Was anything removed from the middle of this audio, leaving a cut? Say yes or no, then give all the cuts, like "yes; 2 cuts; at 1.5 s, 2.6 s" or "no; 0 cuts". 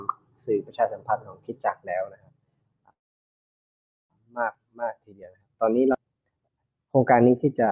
no; 0 cuts